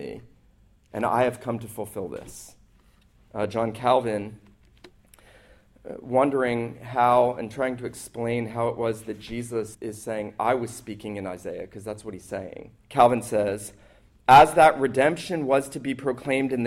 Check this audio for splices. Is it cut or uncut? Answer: cut